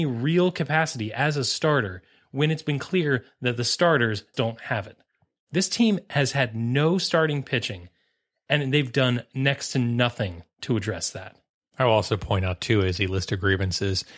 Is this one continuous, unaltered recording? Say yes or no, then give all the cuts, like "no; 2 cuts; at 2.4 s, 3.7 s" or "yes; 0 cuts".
no; 1 cut; at 4.3 s